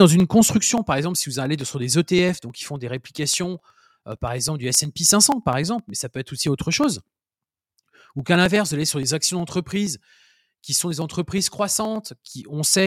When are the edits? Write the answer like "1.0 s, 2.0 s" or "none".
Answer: none